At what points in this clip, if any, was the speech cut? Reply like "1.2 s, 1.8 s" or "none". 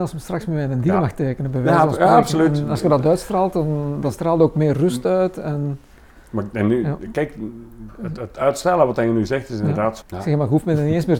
10.0 s